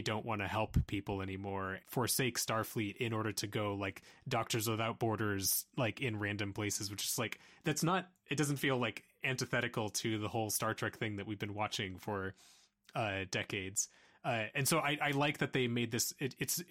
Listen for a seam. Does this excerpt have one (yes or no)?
yes